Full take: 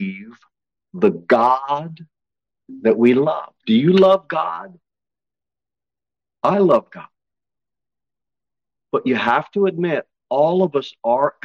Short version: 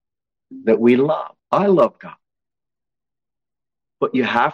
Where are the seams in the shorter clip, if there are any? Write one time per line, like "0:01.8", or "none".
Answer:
0:01.4